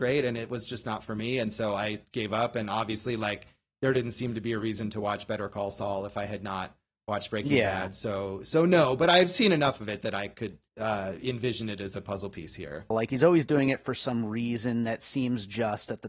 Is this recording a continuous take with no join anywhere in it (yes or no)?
no